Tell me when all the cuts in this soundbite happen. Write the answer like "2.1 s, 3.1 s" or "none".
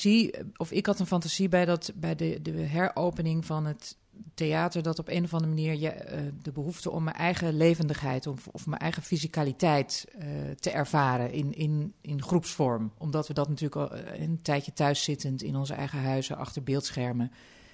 none